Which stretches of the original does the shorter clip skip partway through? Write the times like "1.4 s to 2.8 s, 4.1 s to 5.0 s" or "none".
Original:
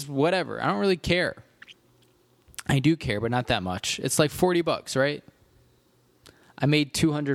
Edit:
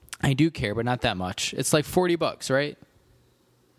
none